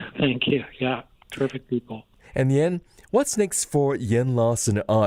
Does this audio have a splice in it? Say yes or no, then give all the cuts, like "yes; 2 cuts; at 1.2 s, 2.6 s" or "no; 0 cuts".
yes; 1 cut; at 1.2 s